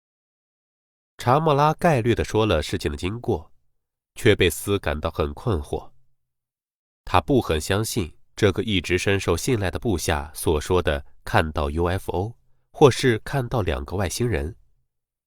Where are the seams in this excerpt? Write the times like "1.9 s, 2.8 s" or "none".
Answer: 1.1 s